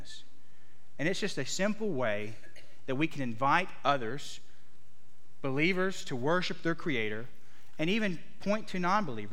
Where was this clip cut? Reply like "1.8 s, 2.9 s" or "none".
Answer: none